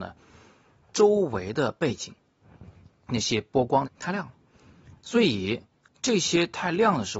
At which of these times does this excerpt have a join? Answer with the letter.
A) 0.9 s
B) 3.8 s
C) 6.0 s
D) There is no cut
B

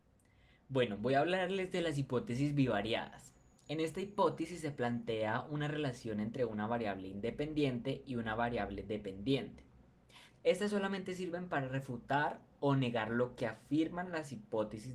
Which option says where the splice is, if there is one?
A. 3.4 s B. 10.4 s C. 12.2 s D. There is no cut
B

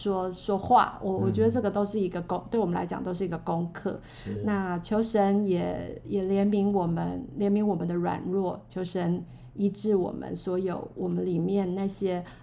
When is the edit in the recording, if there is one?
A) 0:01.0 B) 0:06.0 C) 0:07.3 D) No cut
B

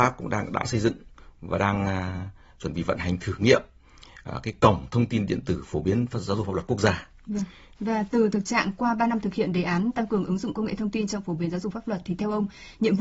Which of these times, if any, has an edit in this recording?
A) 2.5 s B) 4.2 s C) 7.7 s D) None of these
C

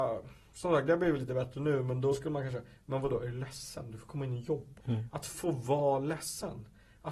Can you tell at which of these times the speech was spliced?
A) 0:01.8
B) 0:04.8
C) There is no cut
B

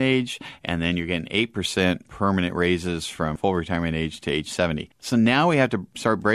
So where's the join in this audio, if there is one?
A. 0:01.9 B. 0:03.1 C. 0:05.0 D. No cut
C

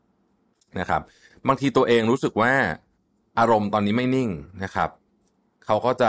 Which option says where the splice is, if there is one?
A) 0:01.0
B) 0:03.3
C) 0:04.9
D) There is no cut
D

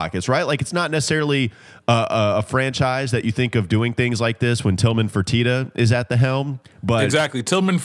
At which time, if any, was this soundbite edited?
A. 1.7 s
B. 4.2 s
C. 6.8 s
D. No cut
D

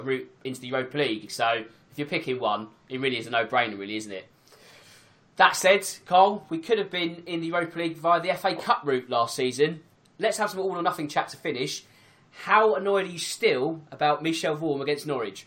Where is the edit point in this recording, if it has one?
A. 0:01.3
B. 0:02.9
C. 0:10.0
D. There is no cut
A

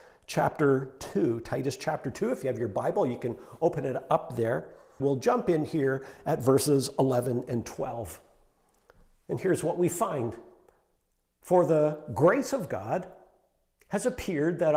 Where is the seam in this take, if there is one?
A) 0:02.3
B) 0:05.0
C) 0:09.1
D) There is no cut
B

